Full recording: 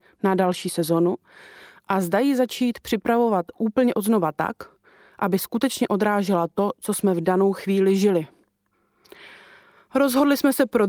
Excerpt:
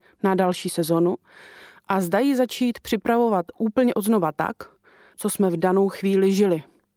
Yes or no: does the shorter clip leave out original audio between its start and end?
yes